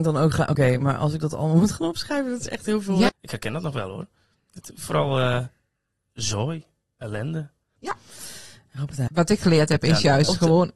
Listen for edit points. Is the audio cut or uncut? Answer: cut